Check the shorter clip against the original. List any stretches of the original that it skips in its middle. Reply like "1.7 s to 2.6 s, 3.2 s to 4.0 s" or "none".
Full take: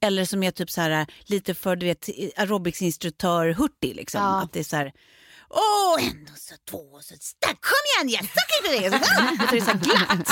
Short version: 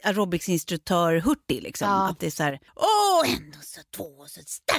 5.0 s to 5.4 s

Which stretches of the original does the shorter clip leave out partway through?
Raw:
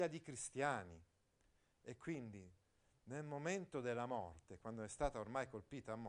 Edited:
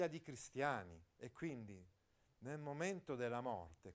1.1 s to 1.8 s

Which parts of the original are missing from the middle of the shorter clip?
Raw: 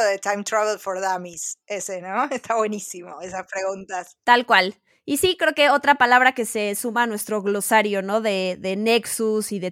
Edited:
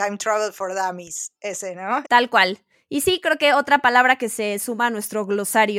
2.3 s to 4.2 s

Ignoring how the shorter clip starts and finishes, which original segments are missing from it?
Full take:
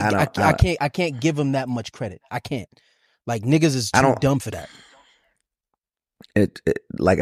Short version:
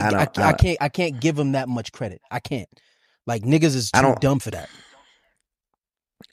none

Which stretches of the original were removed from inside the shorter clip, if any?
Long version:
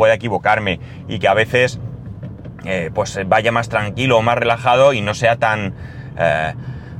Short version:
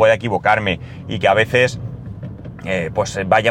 none

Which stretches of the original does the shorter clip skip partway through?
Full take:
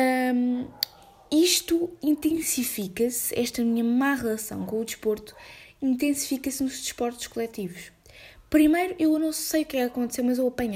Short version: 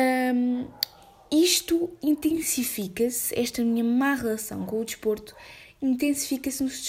none

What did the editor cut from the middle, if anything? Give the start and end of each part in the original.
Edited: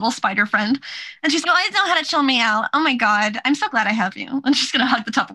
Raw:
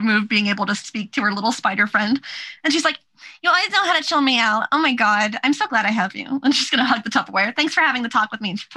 2.8 s to 3.4 s

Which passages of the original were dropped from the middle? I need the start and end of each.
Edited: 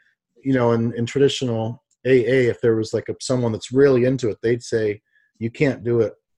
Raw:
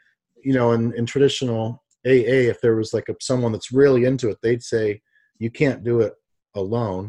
none

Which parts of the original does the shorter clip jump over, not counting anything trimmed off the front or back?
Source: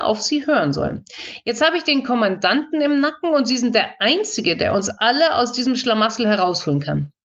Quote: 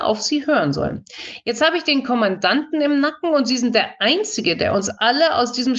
none

